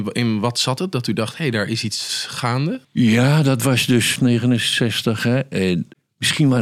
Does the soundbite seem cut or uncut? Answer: cut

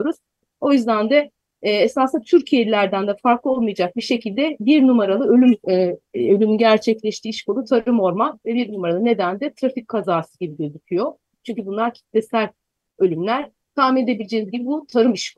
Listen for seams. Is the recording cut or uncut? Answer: cut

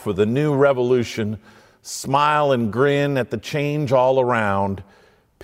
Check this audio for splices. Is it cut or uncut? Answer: uncut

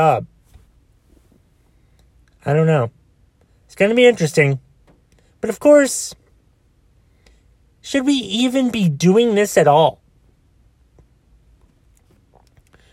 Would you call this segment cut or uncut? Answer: uncut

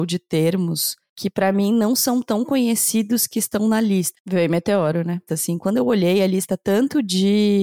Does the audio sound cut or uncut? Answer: cut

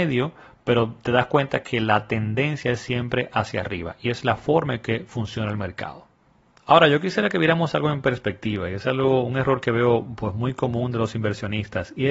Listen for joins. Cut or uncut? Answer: uncut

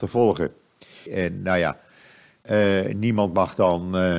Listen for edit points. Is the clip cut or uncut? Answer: cut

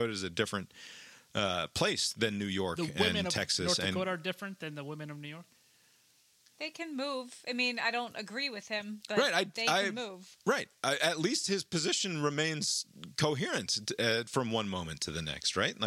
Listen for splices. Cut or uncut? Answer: uncut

